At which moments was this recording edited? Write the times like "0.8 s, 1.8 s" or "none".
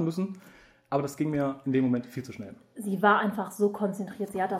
none